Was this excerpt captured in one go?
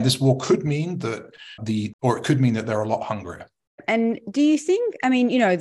no; 1 cut; at 1.9 s

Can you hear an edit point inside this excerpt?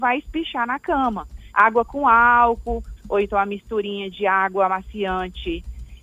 yes; 2 cuts; at 1.5 s, 3.0 s

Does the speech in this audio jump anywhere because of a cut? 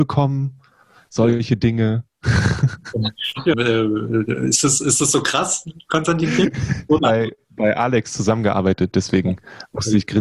yes; 2 cuts; at 3.5 s, 7.0 s

